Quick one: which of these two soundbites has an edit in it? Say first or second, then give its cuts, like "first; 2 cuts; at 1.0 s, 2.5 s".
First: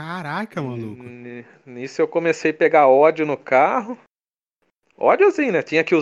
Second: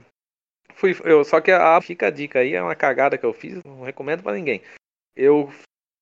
second; 2 cuts; at 1.8 s, 3.6 s